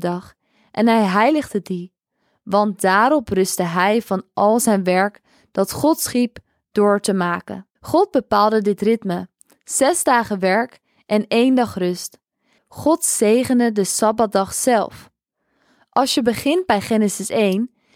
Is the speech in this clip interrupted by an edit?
yes; 2 cuts; at 7.7 s, 12.6 s

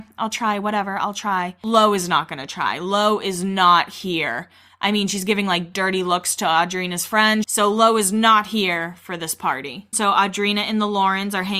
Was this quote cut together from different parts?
yes; 2 cuts; at 7.4 s, 9.9 s

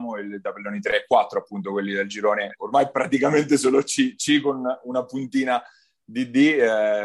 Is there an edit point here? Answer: no; 0 cuts

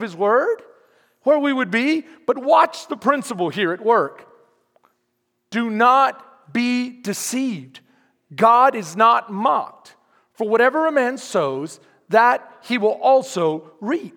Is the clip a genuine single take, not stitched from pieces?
yes; 0 cuts

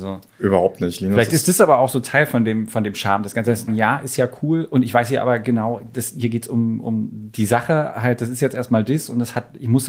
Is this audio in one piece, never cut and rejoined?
no; 1 cut; at 3.7 s

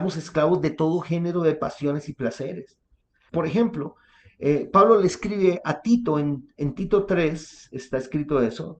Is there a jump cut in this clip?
yes; 1 cut; at 3.3 s

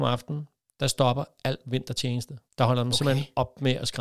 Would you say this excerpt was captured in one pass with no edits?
no; 1 cut; at 2.5 s

